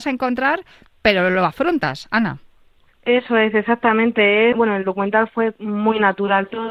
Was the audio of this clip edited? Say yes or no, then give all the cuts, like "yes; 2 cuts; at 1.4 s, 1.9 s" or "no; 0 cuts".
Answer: yes; 1 cut; at 4.5 s